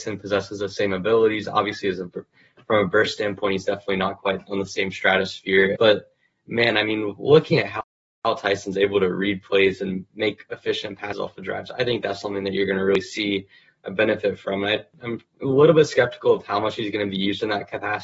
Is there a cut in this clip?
yes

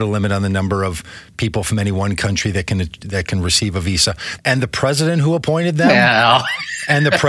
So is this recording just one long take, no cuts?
no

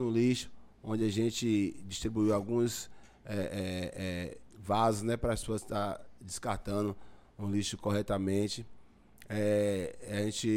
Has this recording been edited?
no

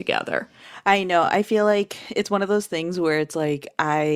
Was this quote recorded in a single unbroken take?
yes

